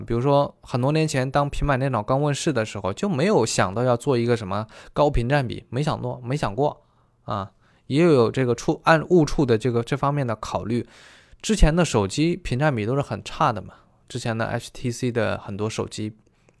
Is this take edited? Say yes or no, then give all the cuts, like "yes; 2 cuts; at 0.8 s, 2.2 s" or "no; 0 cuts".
no; 0 cuts